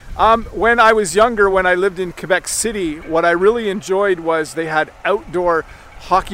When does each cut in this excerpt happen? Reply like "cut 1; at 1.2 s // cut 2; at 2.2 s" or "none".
none